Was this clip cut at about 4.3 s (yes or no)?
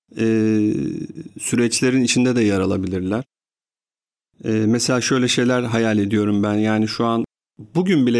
no